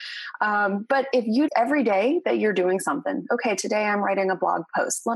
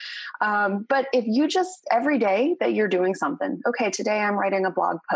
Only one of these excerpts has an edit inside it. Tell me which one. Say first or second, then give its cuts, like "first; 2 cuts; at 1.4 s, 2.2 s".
first; 1 cut; at 1.5 s